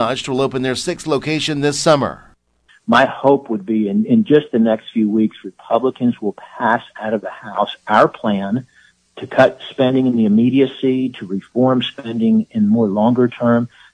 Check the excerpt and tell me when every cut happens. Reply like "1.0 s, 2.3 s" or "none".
2.7 s